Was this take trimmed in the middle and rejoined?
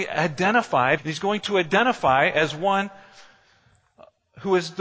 yes; 1 cut; at 1.0 s

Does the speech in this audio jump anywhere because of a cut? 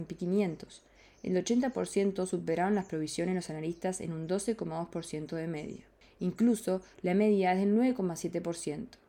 yes; 1 cut; at 6.9 s

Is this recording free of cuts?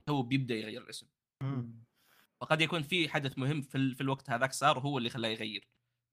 yes; 0 cuts

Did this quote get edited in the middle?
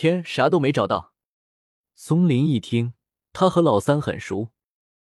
yes; 1 cut; at 3.2 s

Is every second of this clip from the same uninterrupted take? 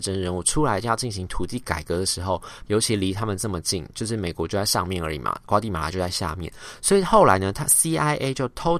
no; 1 cut; at 2.6 s

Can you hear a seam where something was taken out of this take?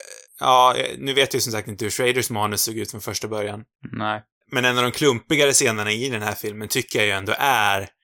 no; 0 cuts

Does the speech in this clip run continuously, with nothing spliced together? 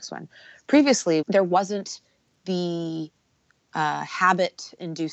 no; 1 cut; at 1.2 s

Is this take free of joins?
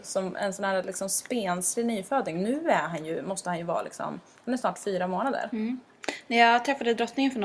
yes; 0 cuts

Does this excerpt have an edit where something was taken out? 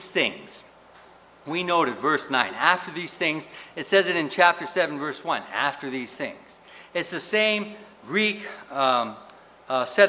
no; 0 cuts

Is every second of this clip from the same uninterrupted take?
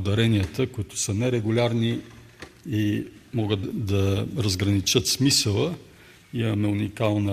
no; 1 cut; at 3.6 s

